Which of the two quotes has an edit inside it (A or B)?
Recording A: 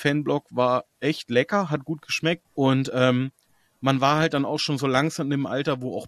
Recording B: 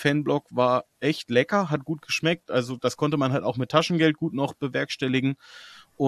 A